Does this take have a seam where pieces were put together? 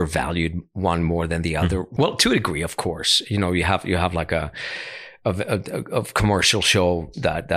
yes; 1 cut; at 2.0 s

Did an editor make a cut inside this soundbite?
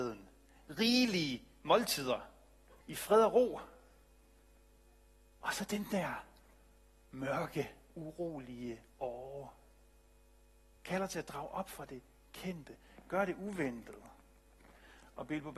yes; 2 cuts; at 2.8 s, 10.8 s

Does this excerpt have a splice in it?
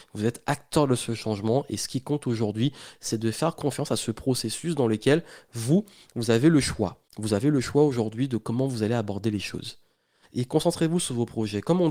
yes; 2 cuts; at 7.1 s, 10.3 s

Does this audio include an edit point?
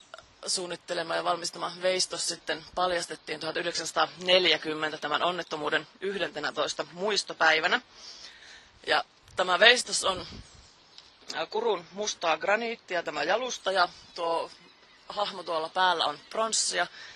no; 0 cuts

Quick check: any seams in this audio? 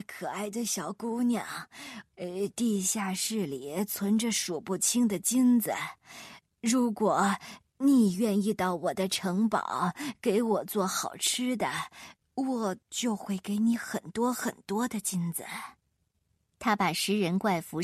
yes; 2 cuts; at 2.1 s, 16.4 s

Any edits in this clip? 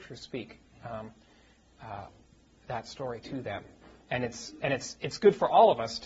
no; 0 cuts

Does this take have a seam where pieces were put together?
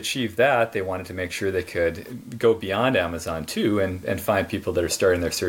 no; 0 cuts

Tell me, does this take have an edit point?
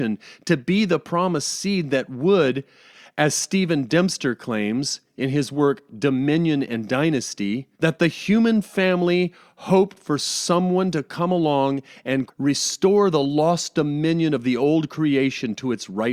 yes; 2 cuts; at 7.7 s, 12.3 s

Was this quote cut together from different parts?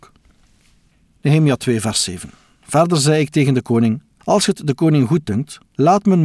no; 0 cuts

